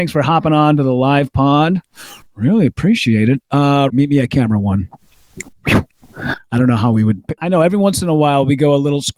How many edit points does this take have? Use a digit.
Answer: 2